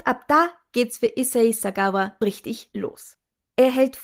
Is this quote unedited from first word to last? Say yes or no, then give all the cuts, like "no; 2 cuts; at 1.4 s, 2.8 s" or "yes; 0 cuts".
no; 1 cut; at 2.2 s